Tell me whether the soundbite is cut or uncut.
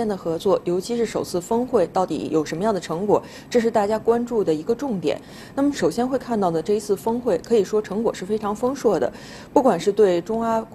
uncut